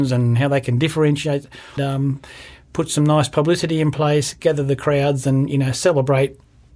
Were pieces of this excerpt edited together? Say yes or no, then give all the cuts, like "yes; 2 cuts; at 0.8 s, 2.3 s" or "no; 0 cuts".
yes; 1 cut; at 1.8 s